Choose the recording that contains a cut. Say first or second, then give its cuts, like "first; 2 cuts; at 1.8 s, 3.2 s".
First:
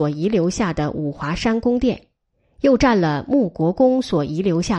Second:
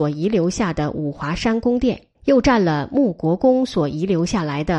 second; 1 cut; at 2.2 s